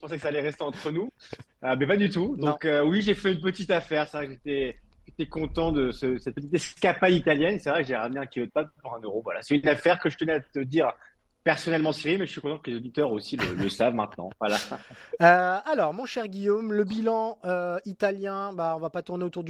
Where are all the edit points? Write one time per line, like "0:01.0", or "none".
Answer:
none